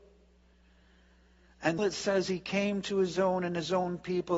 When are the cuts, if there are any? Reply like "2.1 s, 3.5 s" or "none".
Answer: 1.8 s